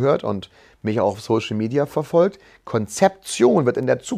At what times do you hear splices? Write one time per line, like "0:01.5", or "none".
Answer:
none